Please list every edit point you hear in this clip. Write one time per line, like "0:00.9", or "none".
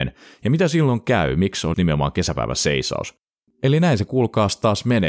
0:01.7
0:03.5